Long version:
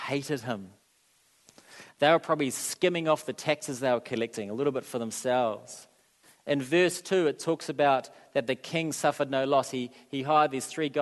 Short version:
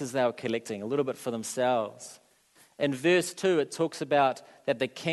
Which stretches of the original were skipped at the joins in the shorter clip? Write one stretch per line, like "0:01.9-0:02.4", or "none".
none